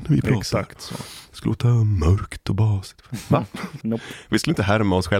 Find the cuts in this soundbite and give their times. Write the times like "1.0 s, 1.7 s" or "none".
3.8 s